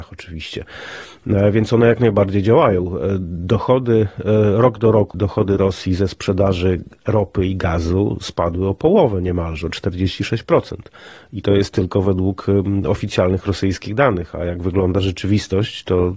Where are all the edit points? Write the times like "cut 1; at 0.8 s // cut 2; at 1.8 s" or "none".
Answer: cut 1; at 5.1 s